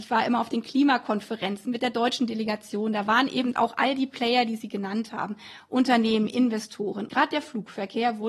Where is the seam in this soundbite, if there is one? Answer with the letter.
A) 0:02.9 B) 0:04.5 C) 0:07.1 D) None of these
C